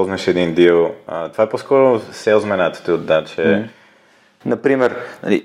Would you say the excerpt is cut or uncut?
cut